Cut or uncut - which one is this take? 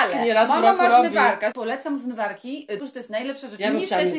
cut